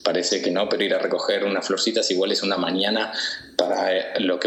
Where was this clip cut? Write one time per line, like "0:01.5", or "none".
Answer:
none